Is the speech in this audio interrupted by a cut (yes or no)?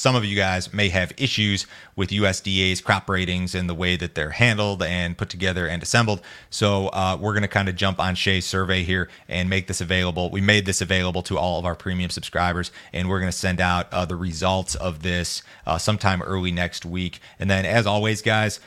no